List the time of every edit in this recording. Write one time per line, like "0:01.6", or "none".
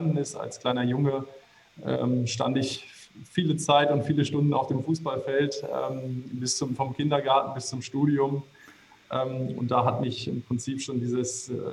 none